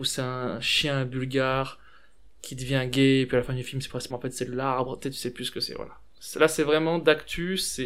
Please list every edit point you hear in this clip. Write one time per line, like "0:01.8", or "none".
0:04.1